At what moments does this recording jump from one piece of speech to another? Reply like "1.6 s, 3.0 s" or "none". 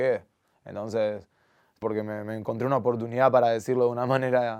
1.8 s